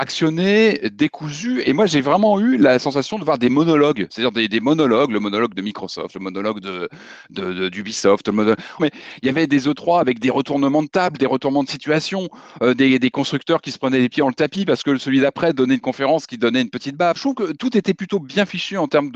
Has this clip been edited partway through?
yes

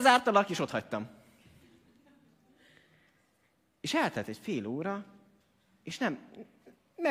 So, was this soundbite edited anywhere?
no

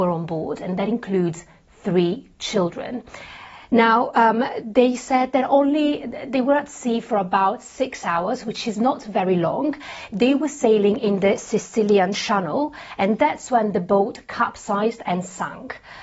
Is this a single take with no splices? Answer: yes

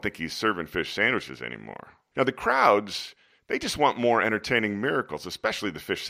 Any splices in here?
yes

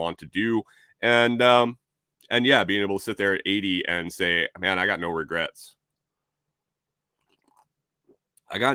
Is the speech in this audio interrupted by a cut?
no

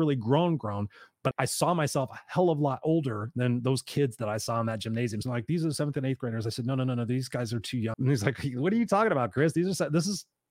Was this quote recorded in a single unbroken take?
no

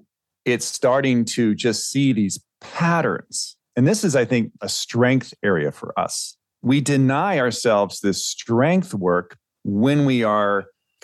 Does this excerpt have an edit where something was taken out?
no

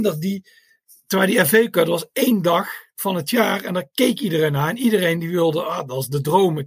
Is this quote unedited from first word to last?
yes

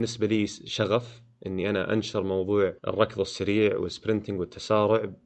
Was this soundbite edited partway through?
yes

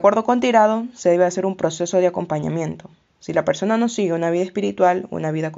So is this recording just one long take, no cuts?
yes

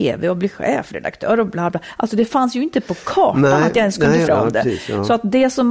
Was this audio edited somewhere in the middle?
yes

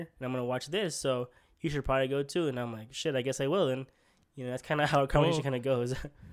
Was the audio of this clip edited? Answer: no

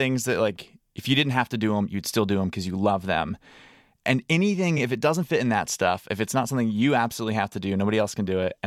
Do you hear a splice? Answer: no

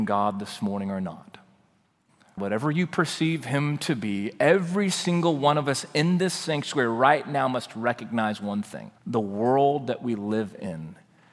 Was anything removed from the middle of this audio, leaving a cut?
yes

